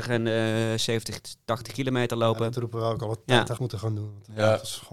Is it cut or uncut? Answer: cut